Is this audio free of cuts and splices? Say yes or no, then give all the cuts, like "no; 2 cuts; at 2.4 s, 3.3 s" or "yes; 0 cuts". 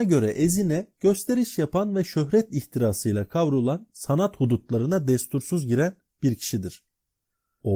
no; 1 cut; at 3.9 s